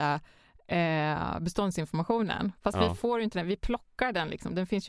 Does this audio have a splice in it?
no; 0 cuts

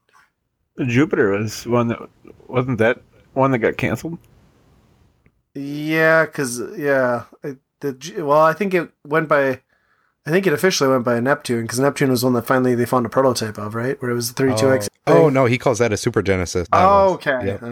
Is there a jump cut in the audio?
yes; 2 cuts; at 14.9 s, 16.7 s

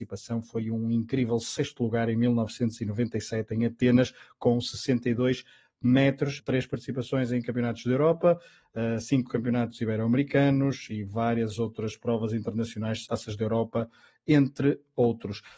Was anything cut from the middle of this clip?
yes; 2 cuts; at 6.4 s, 13.1 s

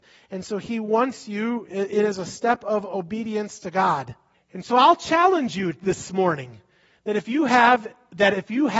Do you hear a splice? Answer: yes; 1 cut; at 4.3 s

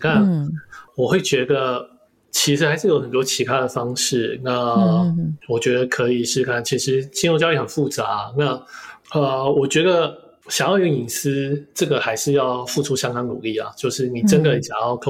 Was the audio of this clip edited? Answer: no; 0 cuts

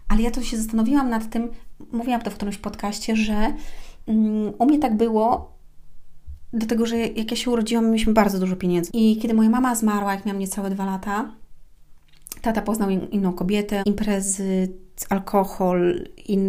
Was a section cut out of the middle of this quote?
yes; 2 cuts; at 8.9 s, 13.8 s

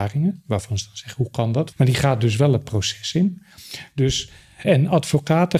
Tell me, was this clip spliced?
yes; 2 cuts; at 1.7 s, 4.6 s

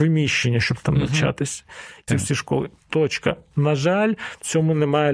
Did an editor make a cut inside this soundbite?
yes; 1 cut; at 2.1 s

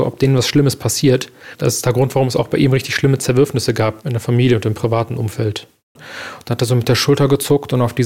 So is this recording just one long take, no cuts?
no; 1 cut; at 6.0 s

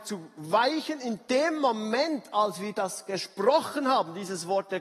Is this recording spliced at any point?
no; 0 cuts

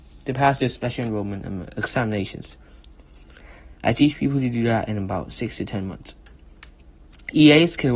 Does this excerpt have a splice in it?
no; 0 cuts

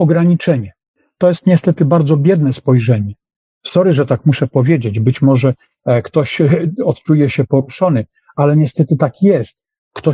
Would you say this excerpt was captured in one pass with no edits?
yes; 0 cuts

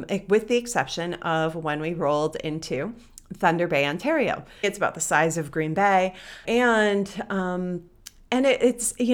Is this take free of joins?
no; 2 cuts; at 4.6 s, 6.4 s

